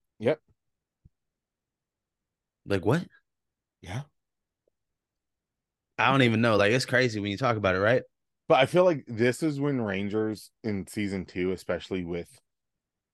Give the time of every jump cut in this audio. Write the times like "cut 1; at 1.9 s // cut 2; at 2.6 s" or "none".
none